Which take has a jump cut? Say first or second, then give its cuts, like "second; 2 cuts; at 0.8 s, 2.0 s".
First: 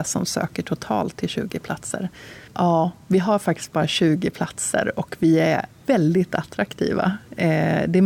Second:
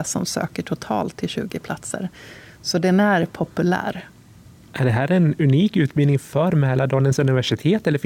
first; 1 cut; at 2.5 s